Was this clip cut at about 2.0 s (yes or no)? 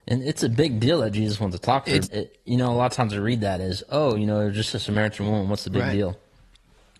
yes